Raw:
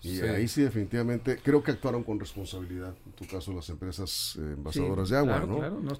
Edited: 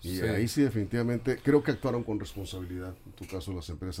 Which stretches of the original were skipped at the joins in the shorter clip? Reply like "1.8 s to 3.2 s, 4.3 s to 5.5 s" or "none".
none